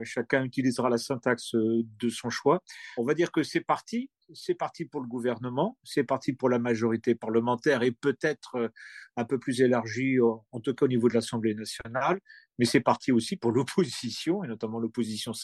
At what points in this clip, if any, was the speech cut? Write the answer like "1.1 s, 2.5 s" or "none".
3.0 s